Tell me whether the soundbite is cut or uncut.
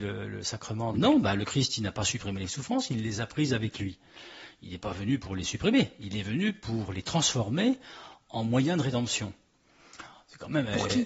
cut